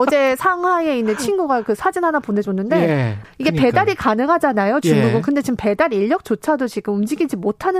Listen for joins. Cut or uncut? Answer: cut